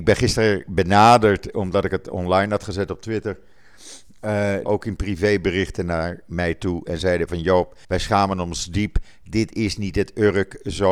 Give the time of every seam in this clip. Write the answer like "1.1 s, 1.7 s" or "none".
4.7 s, 7.8 s